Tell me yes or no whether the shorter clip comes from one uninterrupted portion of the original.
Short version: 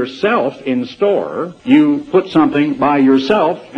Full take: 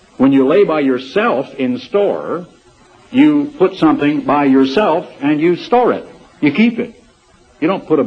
no